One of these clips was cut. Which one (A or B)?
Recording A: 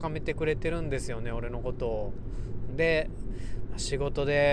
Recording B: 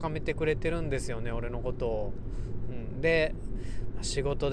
A